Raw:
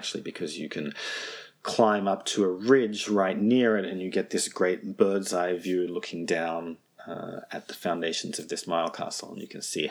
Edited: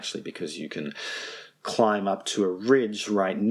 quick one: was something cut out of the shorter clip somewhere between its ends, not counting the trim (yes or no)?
no